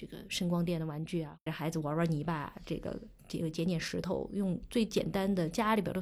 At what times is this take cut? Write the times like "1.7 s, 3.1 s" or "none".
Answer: 1.5 s